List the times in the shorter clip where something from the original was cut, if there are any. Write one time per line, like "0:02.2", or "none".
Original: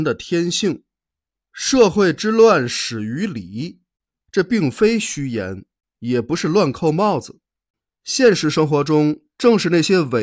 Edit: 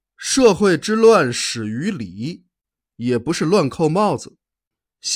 0:02.8

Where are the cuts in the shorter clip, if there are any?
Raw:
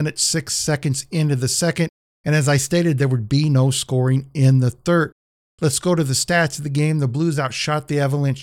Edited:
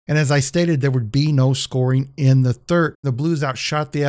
0:03.0

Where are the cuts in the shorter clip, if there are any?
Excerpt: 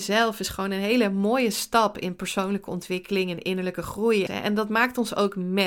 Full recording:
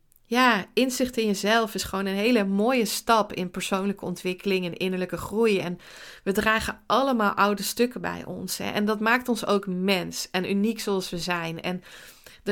0:04.3

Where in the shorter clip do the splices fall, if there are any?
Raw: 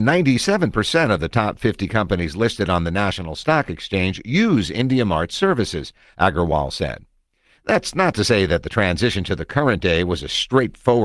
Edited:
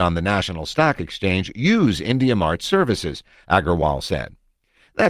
none

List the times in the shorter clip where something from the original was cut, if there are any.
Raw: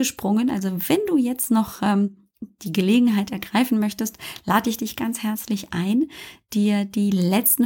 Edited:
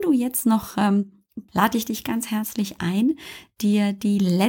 0:01.5

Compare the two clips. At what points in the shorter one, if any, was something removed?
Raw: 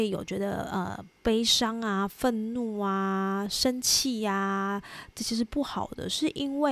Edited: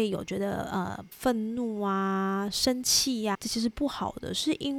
0:01.1
0:03.3

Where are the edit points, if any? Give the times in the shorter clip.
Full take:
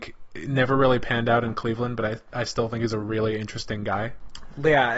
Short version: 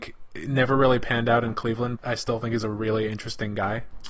0:02.0

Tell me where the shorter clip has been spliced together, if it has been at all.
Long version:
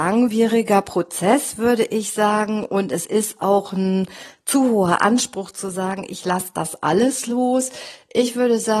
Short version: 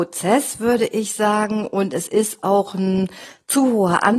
none

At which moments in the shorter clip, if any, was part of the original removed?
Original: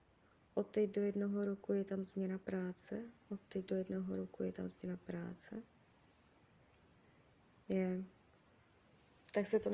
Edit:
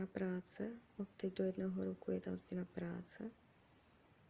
none

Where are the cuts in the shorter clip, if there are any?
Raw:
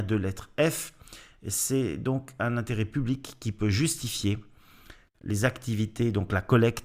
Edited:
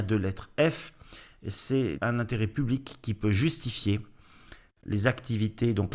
0:02.0

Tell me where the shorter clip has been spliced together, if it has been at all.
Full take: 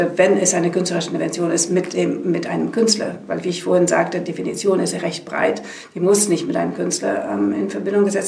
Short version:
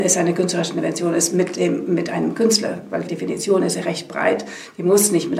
0:03.1

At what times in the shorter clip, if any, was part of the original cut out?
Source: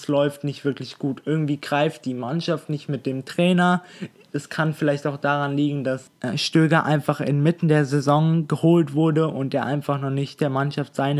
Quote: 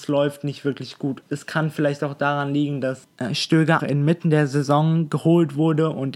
0:01.2
0:03.8

